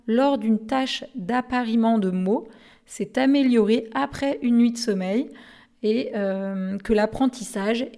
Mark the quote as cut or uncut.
uncut